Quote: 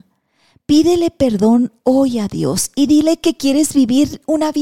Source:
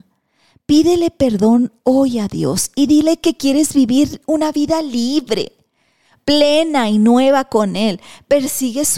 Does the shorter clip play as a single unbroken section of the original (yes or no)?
yes